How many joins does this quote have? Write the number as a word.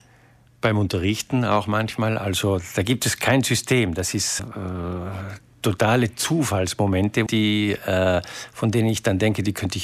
two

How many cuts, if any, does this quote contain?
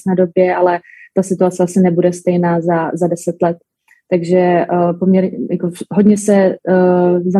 zero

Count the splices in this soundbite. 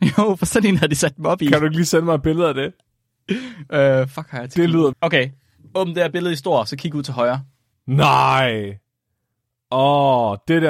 two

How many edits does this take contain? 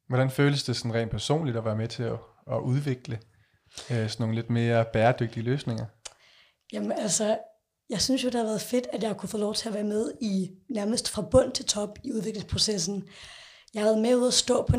zero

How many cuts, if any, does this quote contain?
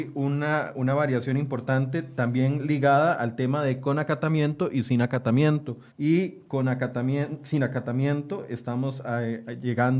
one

